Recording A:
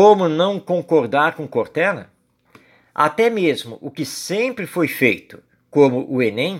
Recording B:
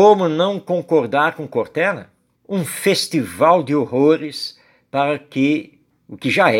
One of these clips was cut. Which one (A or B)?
B